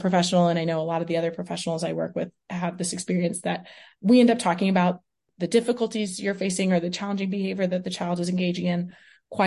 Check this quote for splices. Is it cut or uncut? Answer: uncut